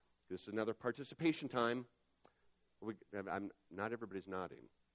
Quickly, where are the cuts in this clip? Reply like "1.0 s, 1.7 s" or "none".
2.7 s